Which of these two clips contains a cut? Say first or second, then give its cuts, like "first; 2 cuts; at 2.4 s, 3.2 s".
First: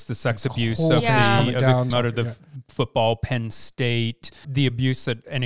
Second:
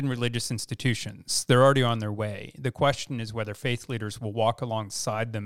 first; 2 cuts; at 1.9 s, 4.4 s